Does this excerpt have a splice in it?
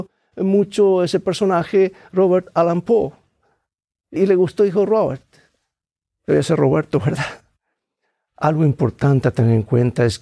yes; 1 cut; at 4.2 s

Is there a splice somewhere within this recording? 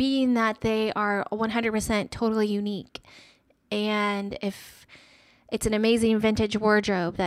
no; 0 cuts

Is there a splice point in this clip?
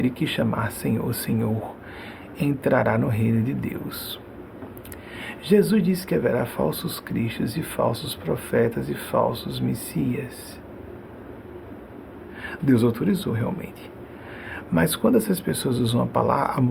yes; 1 cut; at 12.6 s

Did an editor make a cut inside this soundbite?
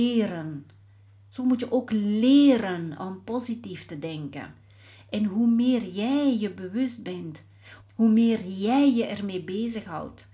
yes; 1 cut; at 7.8 s

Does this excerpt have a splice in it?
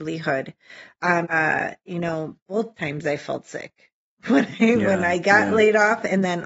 yes; 1 cut; at 1.2 s

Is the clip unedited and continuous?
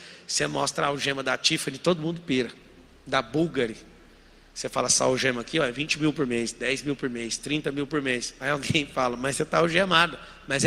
yes; 0 cuts

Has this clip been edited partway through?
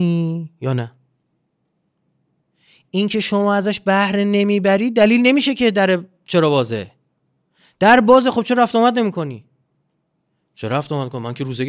no; 0 cuts

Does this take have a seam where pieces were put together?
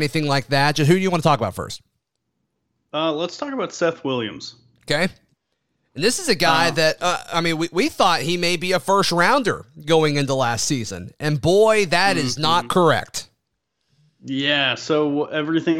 no; 0 cuts

